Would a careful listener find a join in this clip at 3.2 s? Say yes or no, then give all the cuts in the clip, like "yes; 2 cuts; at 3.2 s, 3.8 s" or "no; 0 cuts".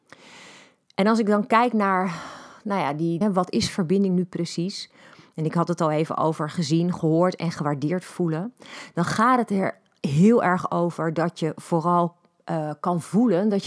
yes; 1 cut; at 3.2 s